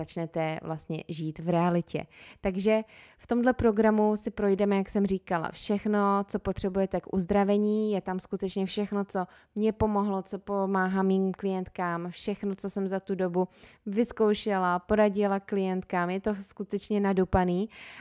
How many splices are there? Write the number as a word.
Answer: zero